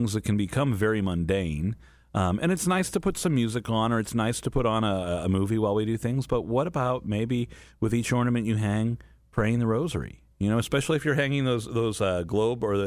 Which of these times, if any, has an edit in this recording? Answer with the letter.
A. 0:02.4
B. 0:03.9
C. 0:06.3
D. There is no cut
D